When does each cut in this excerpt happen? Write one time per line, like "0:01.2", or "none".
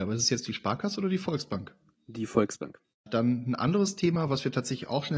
0:02.9